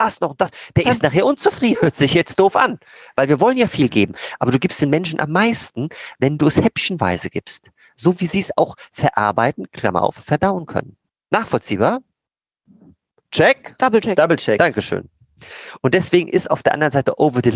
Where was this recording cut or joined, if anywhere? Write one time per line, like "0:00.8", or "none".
0:01.7